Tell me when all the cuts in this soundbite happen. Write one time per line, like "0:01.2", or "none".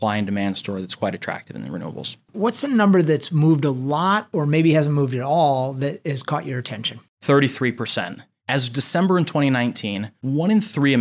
none